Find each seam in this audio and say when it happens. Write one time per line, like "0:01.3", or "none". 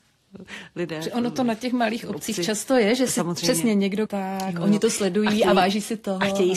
0:04.1